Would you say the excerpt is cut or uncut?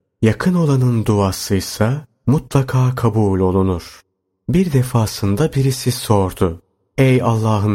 uncut